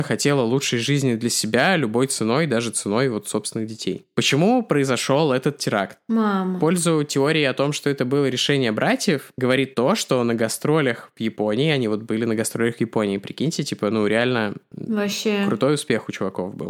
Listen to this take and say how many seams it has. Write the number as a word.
zero